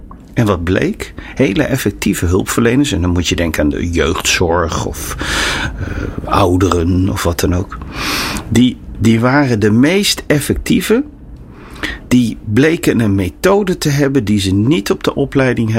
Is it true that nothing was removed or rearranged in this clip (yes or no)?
yes